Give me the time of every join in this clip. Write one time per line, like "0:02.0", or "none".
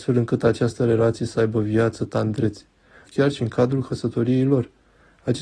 0:03.1